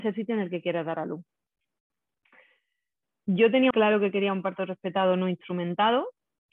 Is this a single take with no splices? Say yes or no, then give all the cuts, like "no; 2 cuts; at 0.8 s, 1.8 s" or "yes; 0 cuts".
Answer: no; 1 cut; at 3.7 s